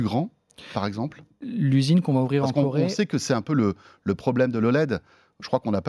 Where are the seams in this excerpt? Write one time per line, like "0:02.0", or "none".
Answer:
none